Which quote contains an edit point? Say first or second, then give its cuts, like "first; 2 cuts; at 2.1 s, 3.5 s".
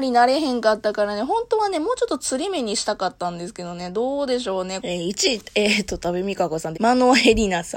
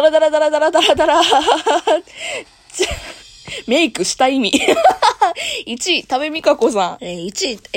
first; 2 cuts; at 4.8 s, 6.7 s